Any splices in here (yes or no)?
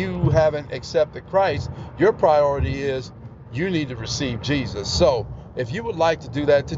no